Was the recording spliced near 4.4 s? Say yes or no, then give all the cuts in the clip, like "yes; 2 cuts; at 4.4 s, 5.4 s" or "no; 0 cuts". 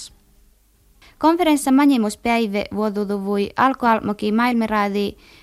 no; 1 cut; at 1.0 s